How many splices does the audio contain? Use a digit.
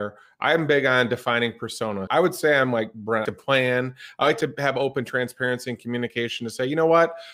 2